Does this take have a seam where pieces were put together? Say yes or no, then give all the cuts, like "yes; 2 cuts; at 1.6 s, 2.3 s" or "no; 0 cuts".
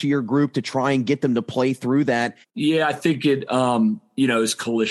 yes; 1 cut; at 2.4 s